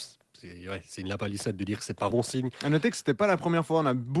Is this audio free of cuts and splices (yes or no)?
no